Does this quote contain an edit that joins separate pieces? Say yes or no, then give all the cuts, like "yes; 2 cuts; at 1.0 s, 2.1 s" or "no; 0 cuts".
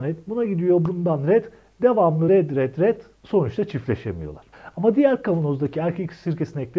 no; 0 cuts